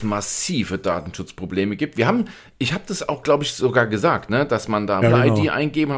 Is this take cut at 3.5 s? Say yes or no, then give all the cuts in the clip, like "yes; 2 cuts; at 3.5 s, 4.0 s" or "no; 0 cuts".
no; 1 cut; at 5.0 s